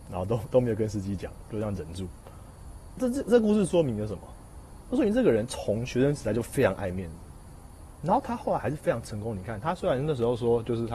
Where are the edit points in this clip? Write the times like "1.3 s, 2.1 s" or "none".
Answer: none